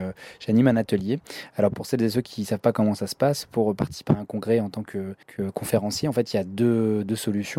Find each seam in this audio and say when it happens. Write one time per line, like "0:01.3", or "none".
0:05.2

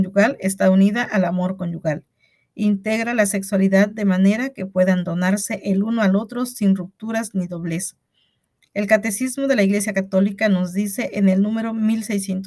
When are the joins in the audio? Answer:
none

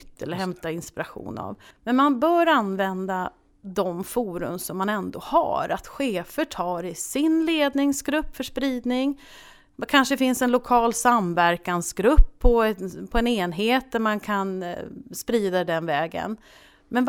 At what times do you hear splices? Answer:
0:01.7

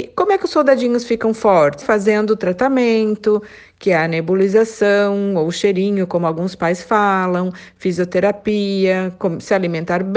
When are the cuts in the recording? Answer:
0:01.8

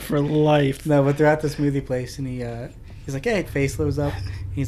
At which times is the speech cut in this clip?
0:03.4

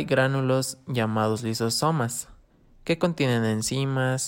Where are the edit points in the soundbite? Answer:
none

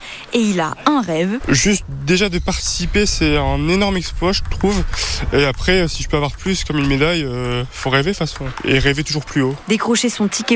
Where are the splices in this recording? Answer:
0:01.4

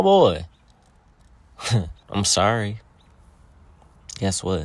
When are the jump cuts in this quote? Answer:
0:02.0

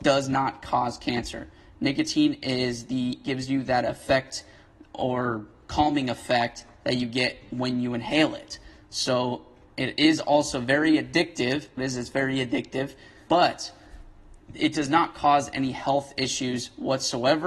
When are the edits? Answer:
0:11.8
0:13.3

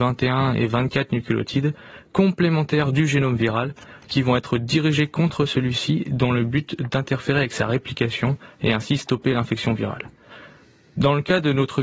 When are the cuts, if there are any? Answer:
none

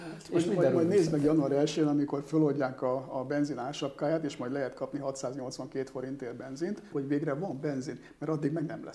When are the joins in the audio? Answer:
0:06.9

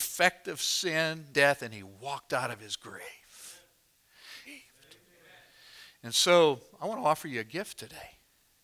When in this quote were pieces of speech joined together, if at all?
0:01.3
0:04.4

